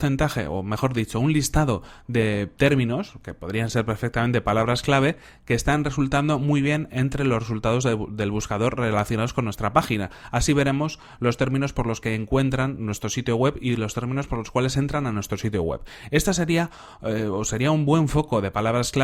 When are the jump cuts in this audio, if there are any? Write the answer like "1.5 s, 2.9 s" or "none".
none